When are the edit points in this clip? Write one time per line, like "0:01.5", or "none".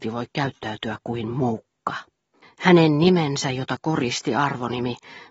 0:02.4